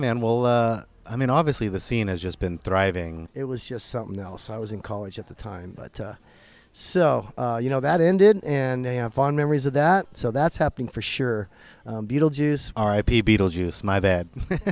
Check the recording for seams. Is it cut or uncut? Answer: cut